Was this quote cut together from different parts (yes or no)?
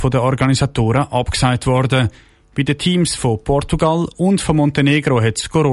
no